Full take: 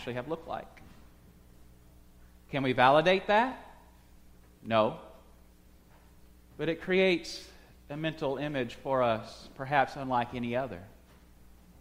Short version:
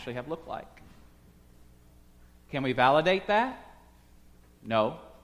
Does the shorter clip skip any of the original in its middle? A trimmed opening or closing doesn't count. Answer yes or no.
no